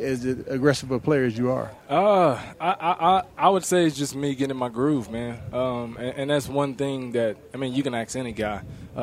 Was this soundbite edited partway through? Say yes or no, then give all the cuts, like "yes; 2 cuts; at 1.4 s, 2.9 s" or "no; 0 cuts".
no; 0 cuts